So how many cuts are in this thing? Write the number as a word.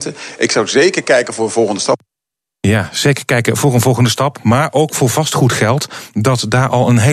zero